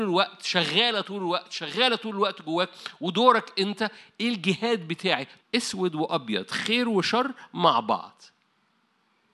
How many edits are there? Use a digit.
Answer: 1